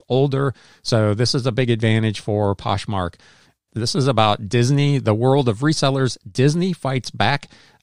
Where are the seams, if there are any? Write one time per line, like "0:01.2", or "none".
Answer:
0:03.7